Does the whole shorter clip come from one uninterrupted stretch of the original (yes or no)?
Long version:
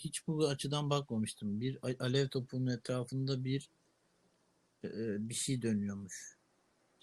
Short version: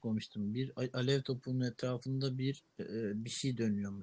no